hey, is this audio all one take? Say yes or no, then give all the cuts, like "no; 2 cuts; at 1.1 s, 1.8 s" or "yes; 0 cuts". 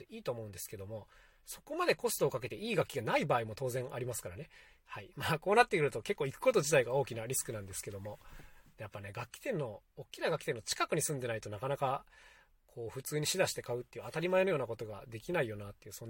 yes; 0 cuts